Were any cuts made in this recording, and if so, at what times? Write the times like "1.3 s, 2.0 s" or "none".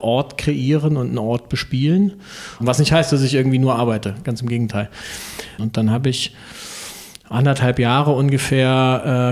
2.6 s, 5.6 s